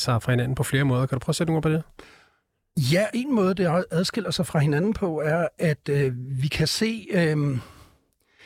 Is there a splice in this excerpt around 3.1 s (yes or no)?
yes